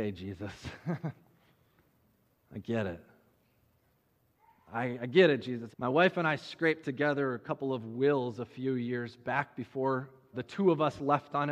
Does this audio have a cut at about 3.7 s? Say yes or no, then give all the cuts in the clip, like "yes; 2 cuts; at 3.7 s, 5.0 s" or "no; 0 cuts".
no; 2 cuts; at 5.7 s, 10.3 s